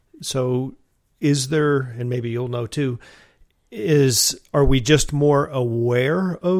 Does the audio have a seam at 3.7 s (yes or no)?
no